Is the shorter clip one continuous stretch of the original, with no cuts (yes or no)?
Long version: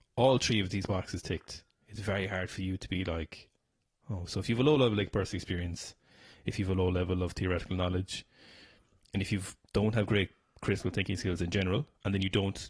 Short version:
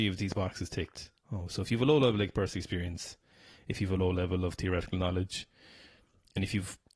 no